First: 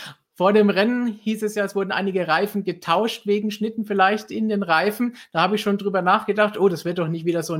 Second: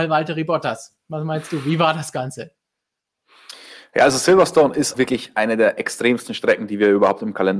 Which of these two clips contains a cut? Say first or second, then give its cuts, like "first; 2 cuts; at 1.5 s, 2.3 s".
second; 1 cut; at 4.9 s